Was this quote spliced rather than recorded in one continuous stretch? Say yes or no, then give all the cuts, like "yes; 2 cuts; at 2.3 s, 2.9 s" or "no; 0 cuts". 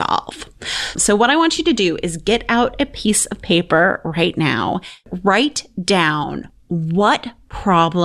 yes; 1 cut; at 0.9 s